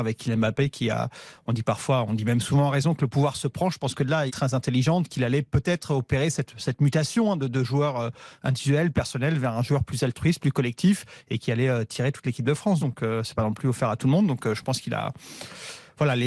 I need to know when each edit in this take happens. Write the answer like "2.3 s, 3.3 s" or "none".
4.3 s, 12.8 s